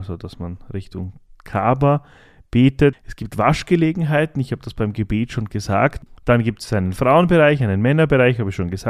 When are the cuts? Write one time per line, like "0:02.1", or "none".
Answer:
0:02.9
0:06.1